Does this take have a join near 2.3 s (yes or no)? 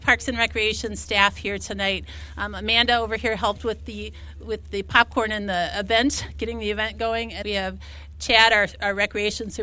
no